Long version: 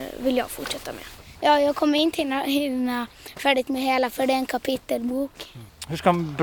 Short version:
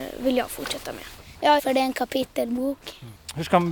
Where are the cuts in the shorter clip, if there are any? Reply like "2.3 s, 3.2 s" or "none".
1.6 s